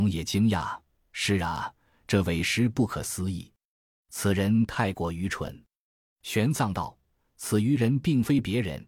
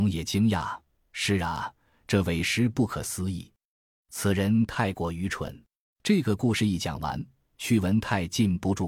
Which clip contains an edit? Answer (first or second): second